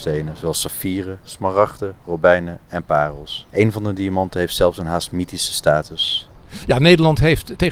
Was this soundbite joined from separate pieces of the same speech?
yes; 1 cut; at 3.5 s

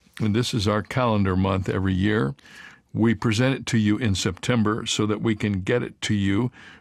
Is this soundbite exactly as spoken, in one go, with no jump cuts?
no; 1 cut; at 2.7 s

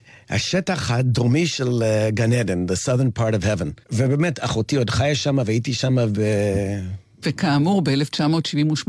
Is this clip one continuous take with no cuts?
no; 2 cuts; at 3.8 s, 7.2 s

